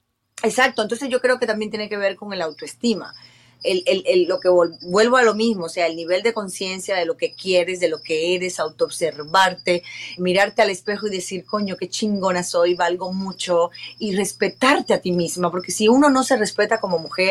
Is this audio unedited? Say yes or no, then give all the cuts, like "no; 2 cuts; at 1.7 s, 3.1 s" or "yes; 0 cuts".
no; 1 cut; at 10.2 s